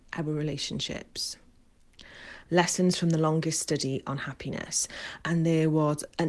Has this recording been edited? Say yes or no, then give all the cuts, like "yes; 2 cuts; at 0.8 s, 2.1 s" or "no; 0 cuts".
yes; 2 cuts; at 2.5 s, 5.2 s